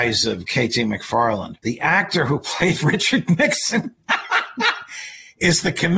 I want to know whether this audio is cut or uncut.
cut